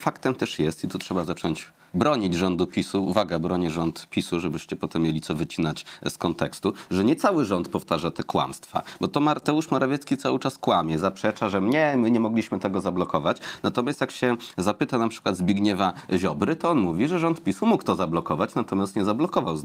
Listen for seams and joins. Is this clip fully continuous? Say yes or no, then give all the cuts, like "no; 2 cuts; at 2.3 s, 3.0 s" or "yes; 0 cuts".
yes; 0 cuts